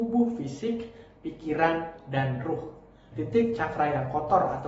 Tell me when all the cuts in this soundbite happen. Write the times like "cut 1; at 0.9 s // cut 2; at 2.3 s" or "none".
cut 1; at 3.1 s